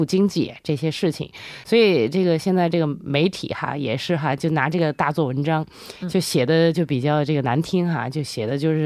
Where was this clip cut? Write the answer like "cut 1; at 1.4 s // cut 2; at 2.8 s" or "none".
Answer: none

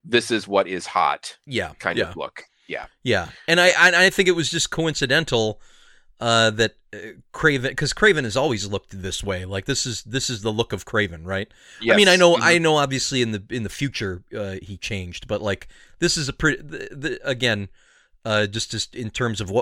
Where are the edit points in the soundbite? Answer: none

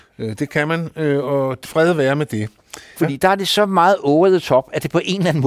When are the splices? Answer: cut 1; at 1.6 s // cut 2; at 3.0 s

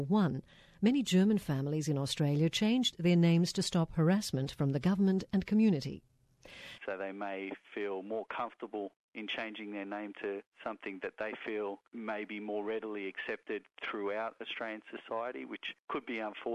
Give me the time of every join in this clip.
cut 1; at 6.8 s

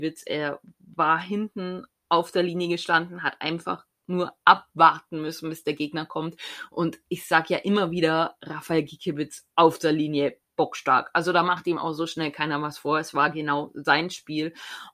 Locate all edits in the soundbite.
none

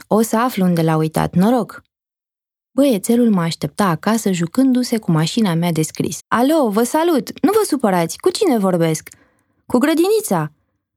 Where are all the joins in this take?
cut 1; at 6.2 s

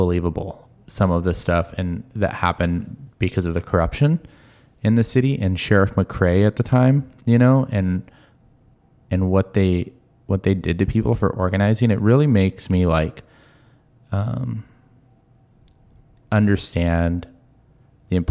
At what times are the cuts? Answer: none

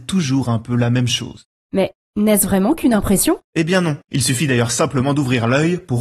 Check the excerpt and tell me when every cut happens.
cut 1; at 3.5 s

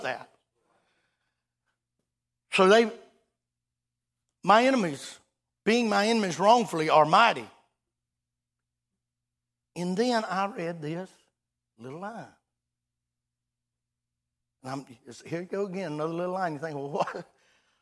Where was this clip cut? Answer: none

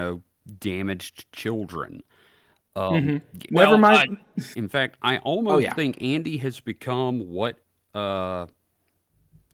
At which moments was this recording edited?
cut 1; at 3.5 s // cut 2; at 4.5 s

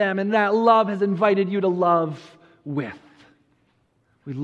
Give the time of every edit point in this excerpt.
none

